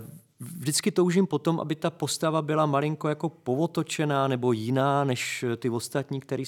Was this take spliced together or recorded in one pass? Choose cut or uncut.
uncut